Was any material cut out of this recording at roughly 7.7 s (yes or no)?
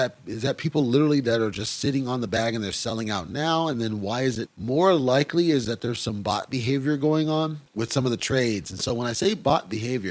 yes